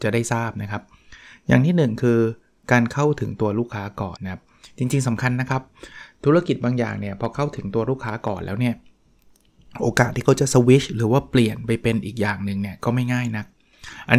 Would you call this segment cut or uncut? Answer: cut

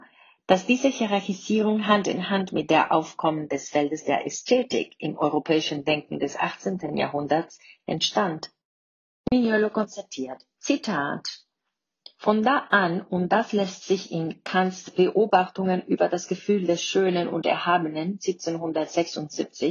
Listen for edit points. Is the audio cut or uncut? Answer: uncut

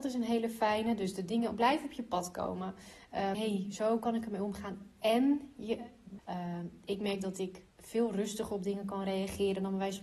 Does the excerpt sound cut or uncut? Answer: cut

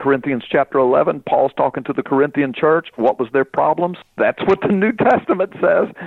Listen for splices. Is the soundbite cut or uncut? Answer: cut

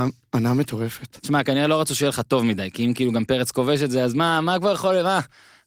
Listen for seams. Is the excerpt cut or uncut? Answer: uncut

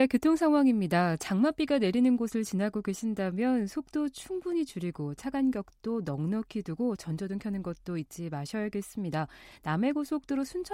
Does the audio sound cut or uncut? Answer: uncut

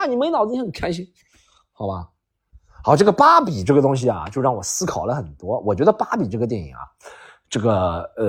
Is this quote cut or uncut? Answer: uncut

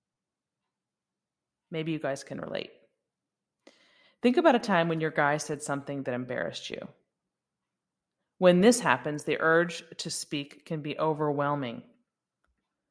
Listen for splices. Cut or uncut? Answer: uncut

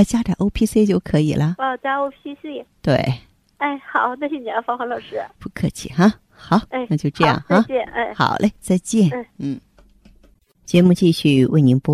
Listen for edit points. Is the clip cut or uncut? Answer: cut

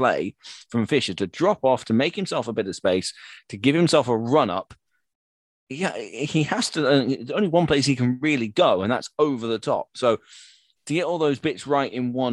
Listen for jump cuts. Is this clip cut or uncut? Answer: uncut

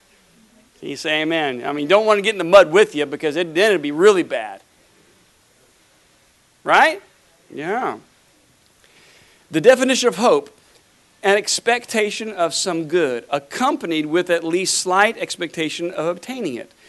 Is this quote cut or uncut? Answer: uncut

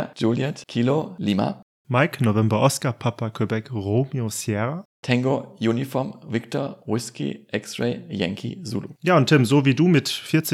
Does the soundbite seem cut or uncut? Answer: cut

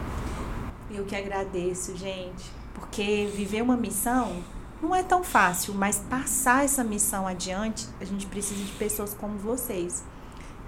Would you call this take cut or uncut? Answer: uncut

